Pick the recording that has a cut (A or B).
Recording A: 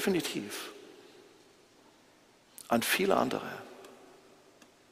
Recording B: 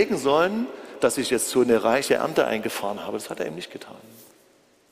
B